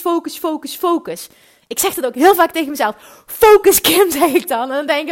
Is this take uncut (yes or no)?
yes